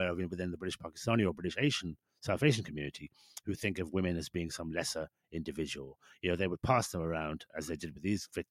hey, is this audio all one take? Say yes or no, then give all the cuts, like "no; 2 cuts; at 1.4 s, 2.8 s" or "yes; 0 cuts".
yes; 0 cuts